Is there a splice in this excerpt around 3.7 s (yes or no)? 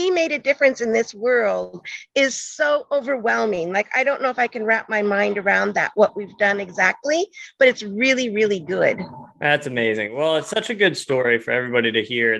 no